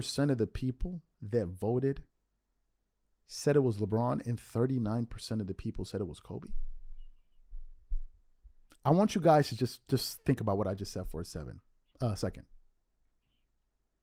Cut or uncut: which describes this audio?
uncut